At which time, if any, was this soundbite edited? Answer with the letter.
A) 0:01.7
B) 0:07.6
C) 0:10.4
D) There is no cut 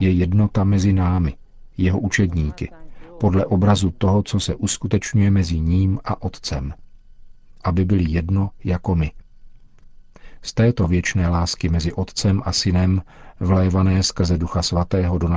B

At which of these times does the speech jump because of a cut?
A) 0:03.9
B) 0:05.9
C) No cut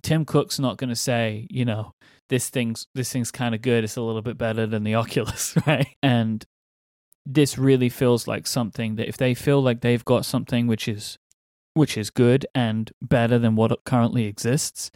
B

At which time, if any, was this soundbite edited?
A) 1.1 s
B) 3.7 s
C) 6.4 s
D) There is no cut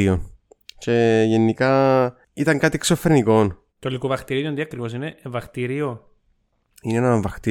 B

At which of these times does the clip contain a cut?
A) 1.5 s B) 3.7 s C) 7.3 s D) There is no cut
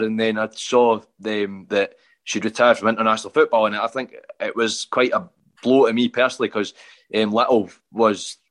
D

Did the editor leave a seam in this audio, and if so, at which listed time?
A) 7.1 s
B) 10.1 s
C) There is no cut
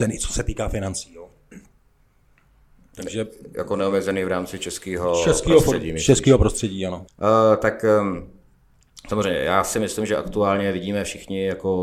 A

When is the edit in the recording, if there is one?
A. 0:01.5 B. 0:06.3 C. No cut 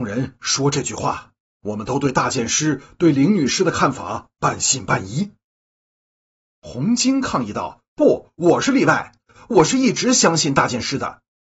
A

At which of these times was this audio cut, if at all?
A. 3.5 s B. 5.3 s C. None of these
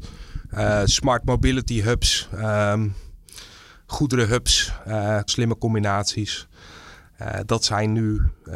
B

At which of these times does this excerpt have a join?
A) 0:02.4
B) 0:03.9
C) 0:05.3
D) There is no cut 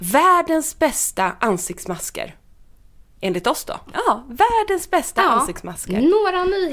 B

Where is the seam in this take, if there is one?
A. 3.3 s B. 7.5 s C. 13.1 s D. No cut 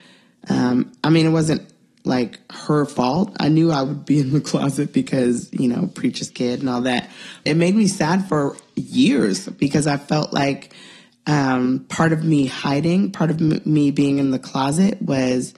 B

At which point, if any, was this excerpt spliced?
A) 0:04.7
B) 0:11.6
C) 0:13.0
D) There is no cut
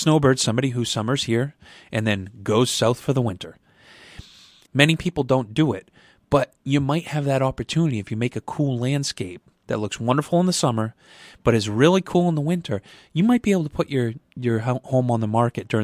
A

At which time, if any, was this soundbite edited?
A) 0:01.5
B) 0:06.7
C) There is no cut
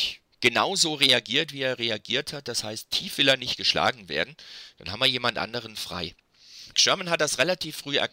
B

